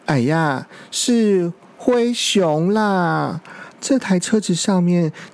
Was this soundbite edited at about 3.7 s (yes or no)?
yes